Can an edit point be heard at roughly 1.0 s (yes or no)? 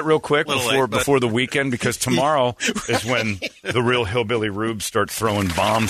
no